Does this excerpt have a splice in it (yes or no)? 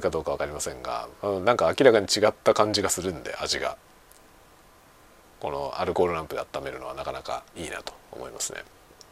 yes